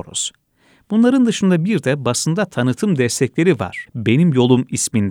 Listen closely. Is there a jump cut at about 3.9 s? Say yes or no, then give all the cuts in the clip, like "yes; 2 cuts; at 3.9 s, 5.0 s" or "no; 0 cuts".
yes; 1 cut; at 3.9 s